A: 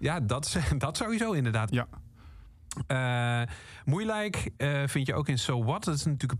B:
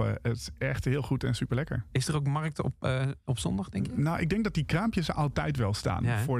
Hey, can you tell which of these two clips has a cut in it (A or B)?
A